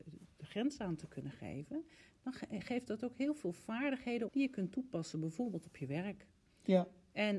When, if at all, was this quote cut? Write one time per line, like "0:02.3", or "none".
0:04.3